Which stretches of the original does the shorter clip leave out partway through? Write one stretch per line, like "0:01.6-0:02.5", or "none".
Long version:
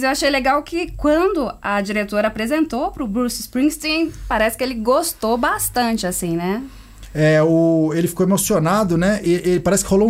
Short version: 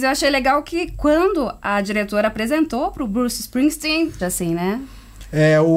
0:04.2-0:06.0